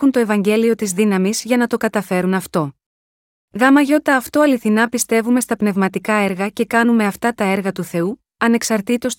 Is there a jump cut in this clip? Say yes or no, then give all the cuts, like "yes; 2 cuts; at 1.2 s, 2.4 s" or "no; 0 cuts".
yes; 1 cut; at 3.4 s